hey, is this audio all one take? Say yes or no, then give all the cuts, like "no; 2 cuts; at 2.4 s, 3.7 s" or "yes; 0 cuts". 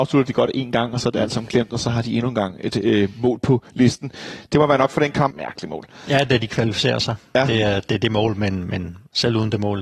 no; 1 cut; at 5.3 s